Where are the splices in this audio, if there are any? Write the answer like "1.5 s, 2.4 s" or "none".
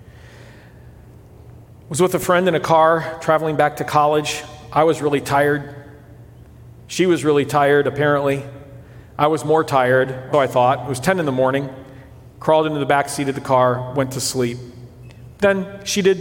10.3 s